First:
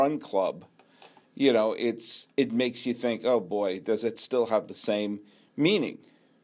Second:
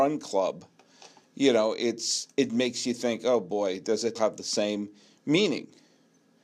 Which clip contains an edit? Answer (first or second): second